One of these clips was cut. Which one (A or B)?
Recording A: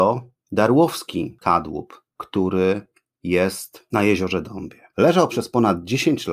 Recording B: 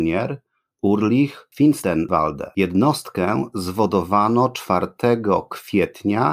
A